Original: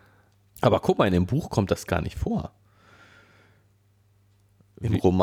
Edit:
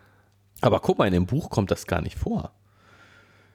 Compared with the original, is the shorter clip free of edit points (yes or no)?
yes